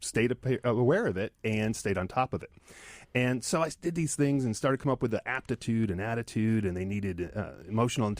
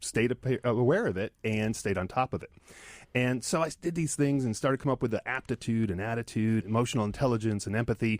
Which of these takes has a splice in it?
second; 1 cut; at 6.6 s

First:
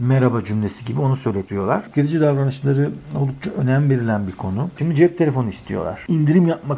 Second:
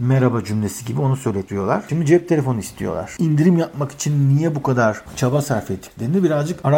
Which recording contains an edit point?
first; 2 cuts; at 1.9 s, 4.8 s

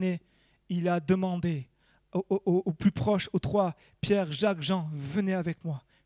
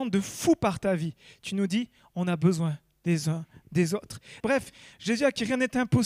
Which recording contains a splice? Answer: second; 1 cut; at 4.4 s

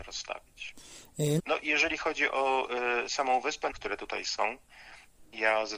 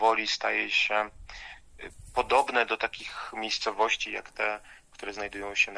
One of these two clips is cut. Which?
first; 2 cuts; at 1.4 s, 3.7 s

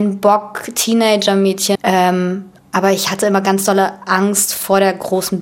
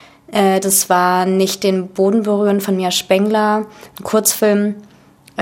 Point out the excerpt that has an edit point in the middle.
first; 1 cut; at 1.8 s

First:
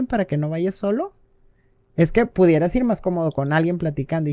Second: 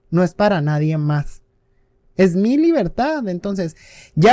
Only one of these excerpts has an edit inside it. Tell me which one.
second; 1 cut; at 2.0 s

